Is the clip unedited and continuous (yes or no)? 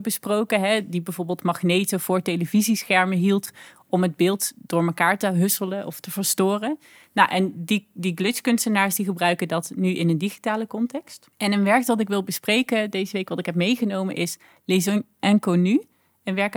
no